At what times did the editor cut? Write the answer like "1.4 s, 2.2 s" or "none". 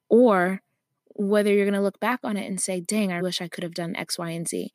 3.2 s